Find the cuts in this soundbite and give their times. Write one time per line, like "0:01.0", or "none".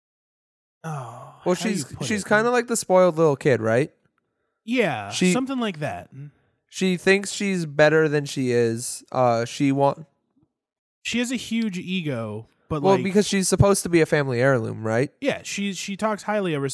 none